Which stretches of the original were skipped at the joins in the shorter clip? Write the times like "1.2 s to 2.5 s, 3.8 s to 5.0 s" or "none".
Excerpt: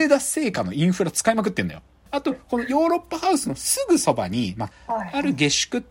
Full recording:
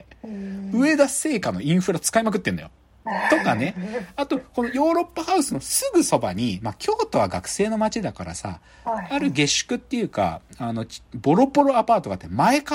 2.9 s to 4.1 s, 6.8 s to 8.7 s